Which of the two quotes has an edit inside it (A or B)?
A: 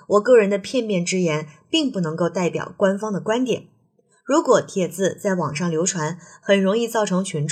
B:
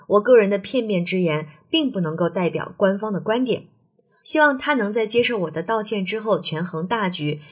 B